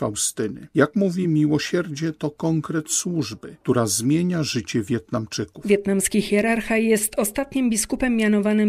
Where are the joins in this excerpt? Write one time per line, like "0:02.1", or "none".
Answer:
none